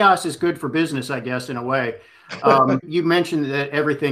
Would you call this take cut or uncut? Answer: cut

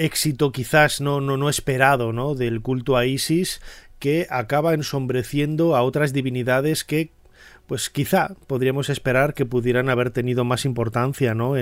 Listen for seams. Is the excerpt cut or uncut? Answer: uncut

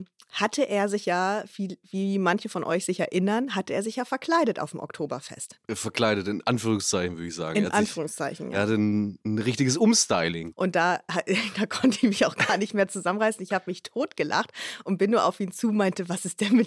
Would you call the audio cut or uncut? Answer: cut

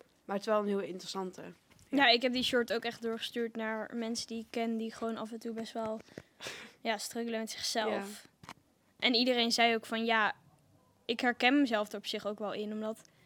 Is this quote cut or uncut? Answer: uncut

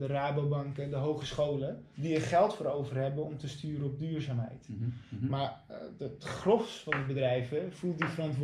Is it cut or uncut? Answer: cut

